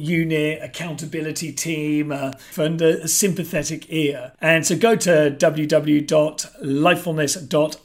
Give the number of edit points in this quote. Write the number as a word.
two